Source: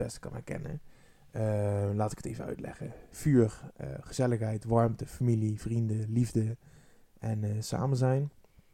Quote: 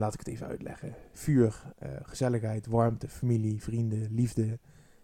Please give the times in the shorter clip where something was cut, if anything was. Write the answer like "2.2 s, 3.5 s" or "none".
none

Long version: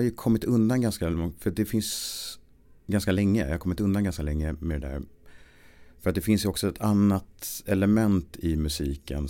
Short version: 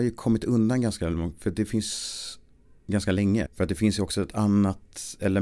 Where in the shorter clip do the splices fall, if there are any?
3.5 s

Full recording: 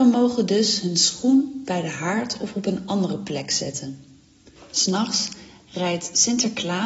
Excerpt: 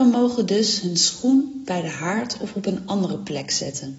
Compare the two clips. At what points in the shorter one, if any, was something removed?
none

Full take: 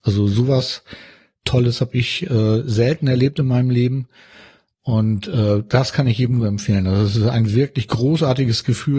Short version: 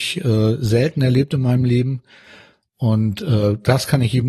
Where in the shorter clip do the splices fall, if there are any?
none

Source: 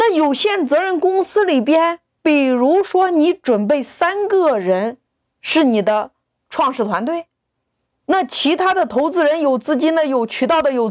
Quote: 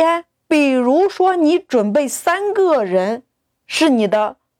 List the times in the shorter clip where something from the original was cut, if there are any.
none

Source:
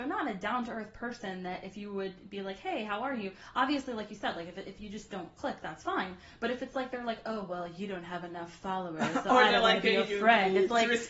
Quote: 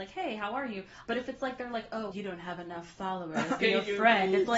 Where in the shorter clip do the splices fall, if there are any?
1.0 s, 2.1 s, 3.6 s

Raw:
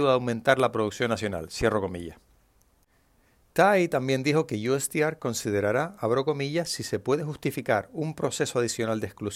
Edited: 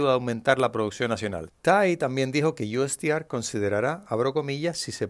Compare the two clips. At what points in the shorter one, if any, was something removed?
1.5 s

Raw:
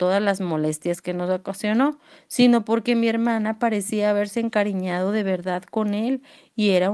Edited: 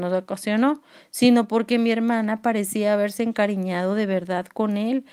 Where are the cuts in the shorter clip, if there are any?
none

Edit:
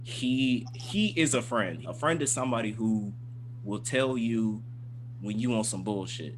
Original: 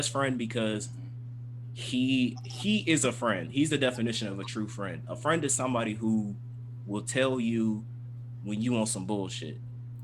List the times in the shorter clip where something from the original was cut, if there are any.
1.8 s

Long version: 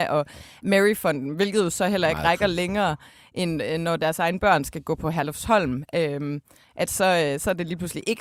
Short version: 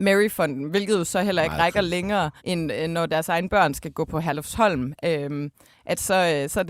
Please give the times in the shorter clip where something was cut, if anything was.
2.4 s

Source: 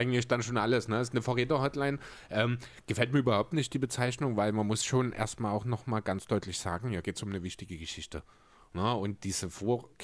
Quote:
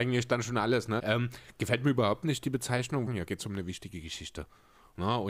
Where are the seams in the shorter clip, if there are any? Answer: 1.0 s, 3.1 s

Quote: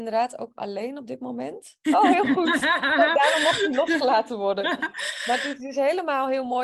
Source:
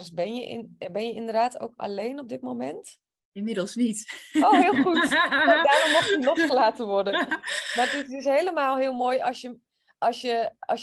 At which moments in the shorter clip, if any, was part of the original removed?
1.8 s

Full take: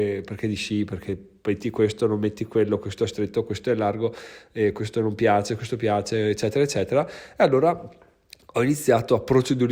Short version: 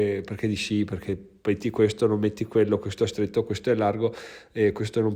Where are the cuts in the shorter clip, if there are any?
none

